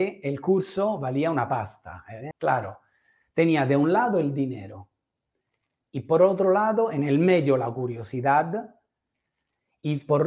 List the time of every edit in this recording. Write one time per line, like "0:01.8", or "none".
0:02.3